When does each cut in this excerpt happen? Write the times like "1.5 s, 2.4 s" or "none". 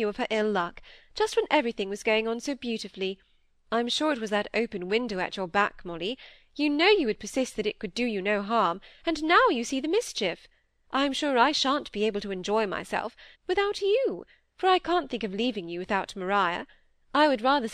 13.3 s